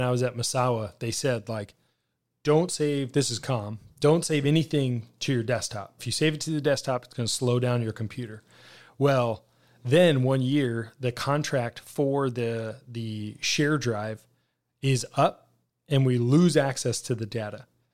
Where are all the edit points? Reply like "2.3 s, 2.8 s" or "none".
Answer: 6.0 s